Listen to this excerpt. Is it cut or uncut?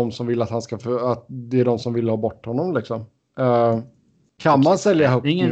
cut